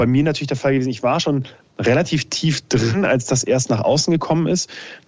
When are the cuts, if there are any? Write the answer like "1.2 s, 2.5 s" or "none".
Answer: none

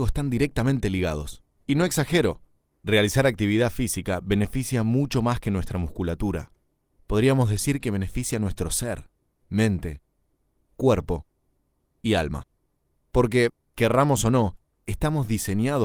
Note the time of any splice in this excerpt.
1.6 s

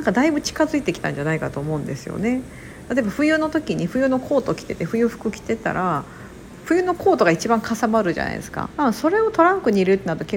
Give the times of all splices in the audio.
8.7 s

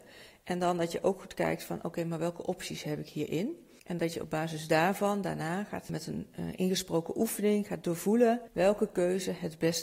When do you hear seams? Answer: 3.8 s

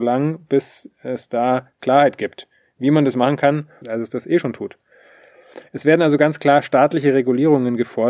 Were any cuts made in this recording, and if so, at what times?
3.8 s

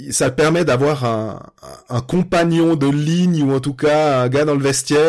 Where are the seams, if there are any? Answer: none

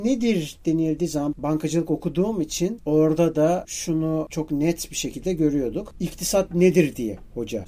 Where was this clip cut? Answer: none

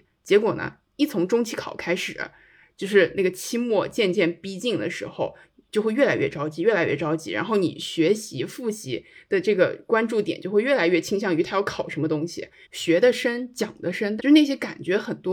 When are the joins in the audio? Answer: 12.6 s, 14.2 s

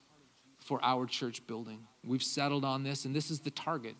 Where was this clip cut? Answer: none

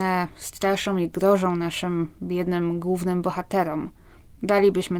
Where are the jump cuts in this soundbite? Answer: none

